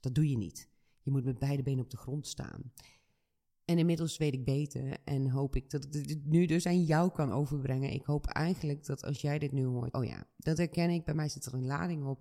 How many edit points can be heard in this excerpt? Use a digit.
1